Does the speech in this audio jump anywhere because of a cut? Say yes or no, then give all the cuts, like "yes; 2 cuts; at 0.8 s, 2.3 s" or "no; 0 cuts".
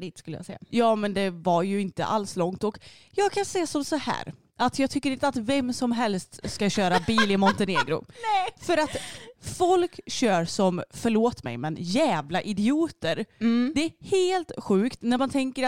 no; 0 cuts